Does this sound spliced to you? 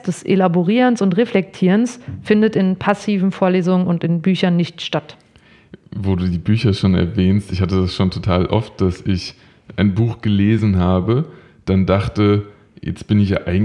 no; 0 cuts

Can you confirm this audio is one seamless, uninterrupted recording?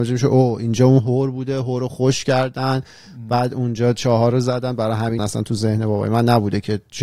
no; 1 cut; at 5.2 s

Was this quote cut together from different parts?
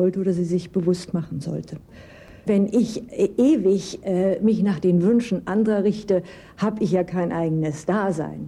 no; 0 cuts

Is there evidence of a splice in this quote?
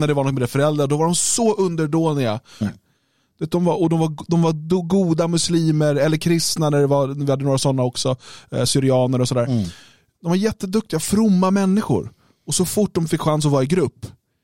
yes; 1 cut; at 2.6 s

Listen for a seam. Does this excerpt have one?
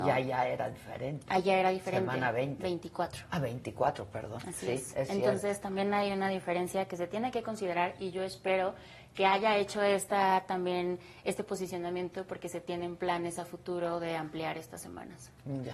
no; 0 cuts

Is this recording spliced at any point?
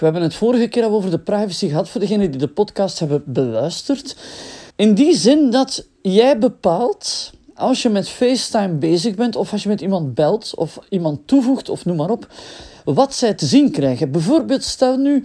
yes; 1 cut; at 4.7 s

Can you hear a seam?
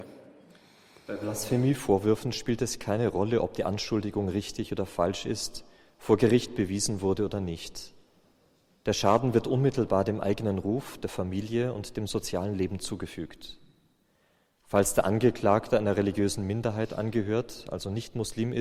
no; 0 cuts

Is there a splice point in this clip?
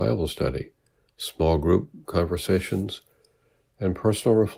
no; 0 cuts

